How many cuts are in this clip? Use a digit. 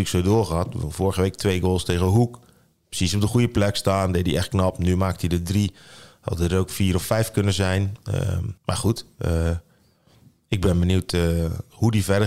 1